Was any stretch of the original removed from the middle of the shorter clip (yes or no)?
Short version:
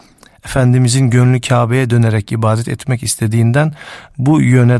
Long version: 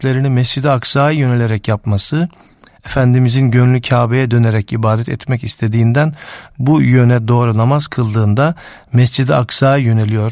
no